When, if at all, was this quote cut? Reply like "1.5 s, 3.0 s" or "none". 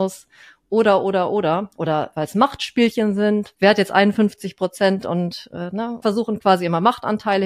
3.5 s, 6.0 s